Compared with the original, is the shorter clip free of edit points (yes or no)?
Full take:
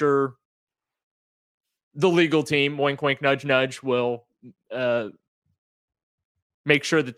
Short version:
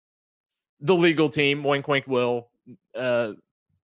no